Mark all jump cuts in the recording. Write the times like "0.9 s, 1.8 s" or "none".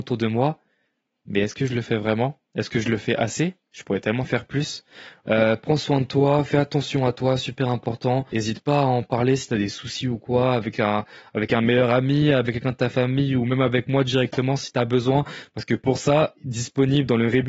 5.2 s

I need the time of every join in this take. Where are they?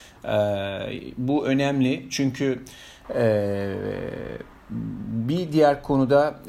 3.0 s

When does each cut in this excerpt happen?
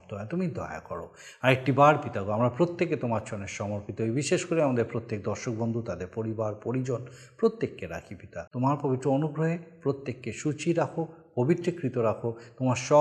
8.5 s

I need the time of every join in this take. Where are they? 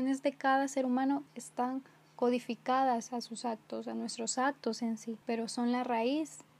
1.3 s, 5.2 s

